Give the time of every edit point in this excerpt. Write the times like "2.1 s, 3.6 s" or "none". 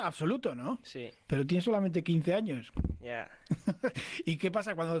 none